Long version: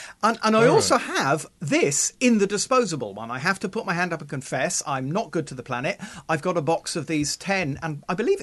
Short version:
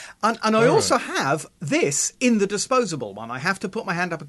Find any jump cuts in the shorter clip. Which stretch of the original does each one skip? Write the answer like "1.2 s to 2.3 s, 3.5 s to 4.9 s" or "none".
none

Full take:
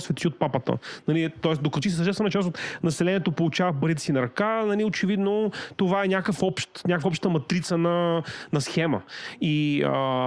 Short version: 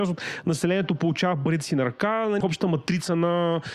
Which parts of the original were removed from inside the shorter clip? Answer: 4.8 s to 7.0 s

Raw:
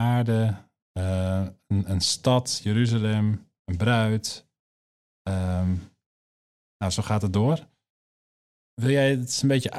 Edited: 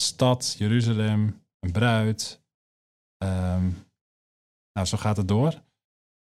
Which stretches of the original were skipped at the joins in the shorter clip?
none

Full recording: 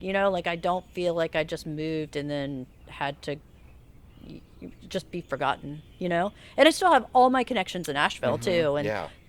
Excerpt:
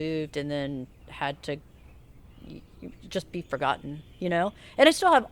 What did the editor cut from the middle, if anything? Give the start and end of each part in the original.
none

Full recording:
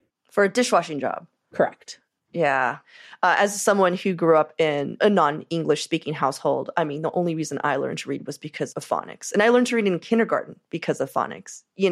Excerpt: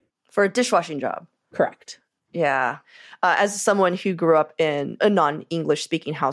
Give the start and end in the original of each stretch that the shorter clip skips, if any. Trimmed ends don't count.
none

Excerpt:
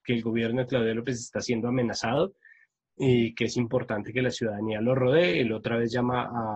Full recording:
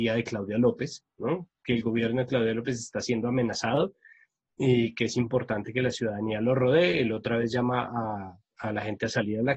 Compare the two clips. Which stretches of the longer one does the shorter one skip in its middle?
none

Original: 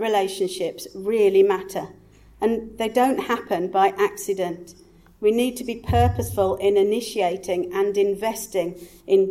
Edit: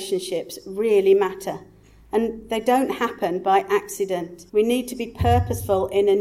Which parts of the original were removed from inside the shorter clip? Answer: 4.8 s to 5.2 s

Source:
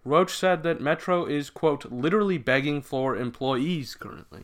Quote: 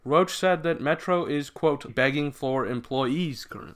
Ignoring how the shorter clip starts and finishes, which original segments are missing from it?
1.9 s to 2.4 s

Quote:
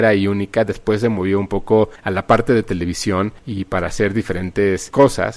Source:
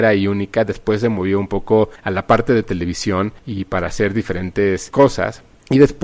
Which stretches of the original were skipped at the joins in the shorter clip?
none

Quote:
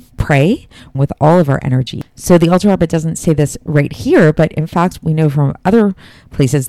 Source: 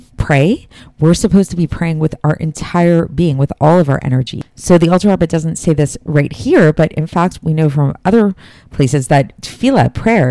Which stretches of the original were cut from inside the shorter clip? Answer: 0.9 s to 3.3 s

